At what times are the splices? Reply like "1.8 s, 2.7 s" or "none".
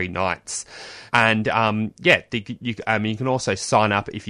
1.1 s